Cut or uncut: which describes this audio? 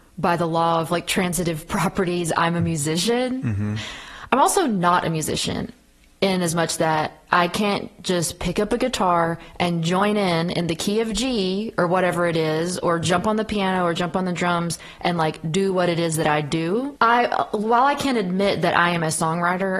cut